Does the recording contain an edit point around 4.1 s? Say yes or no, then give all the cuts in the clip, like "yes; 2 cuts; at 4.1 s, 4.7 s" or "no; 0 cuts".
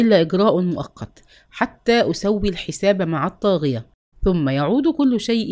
yes; 1 cut; at 4.1 s